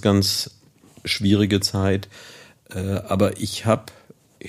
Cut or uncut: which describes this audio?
uncut